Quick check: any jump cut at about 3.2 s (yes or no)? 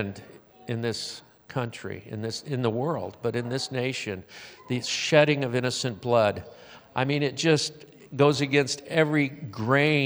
no